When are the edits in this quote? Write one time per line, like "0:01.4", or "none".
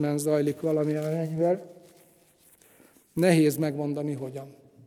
none